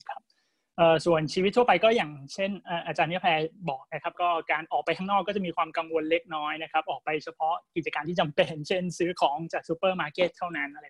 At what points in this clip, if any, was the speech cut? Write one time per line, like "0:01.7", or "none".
0:04.1